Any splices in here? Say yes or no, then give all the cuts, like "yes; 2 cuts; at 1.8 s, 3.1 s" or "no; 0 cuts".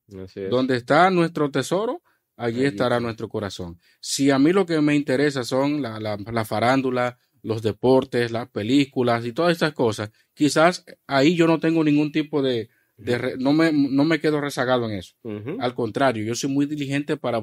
no; 0 cuts